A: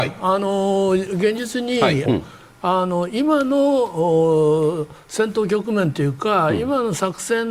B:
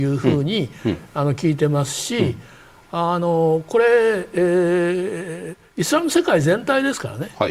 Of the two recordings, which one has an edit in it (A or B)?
A